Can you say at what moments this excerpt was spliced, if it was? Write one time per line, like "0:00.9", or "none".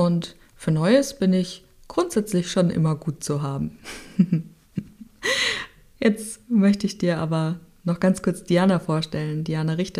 none